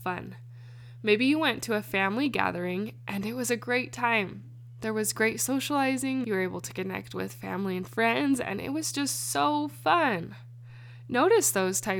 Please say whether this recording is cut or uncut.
cut